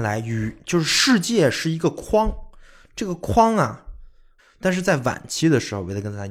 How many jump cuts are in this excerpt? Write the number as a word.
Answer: one